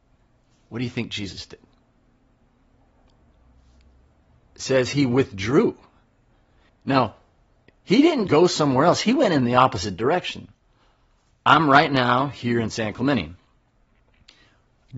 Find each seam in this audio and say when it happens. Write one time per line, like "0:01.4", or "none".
0:06.7
0:08.3